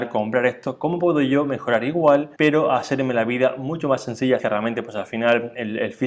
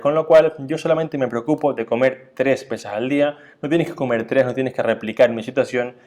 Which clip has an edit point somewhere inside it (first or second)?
first